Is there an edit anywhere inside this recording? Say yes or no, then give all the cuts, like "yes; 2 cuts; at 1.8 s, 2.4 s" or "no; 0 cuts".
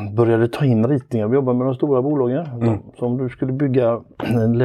yes; 1 cut; at 2.6 s